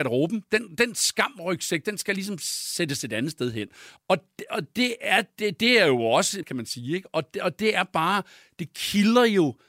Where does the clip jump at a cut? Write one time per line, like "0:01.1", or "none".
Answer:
0:04.0
0:06.4